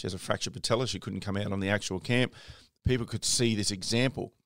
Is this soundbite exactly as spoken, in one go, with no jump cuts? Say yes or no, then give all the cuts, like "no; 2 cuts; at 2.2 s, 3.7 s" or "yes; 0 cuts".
no; 1 cut; at 2.8 s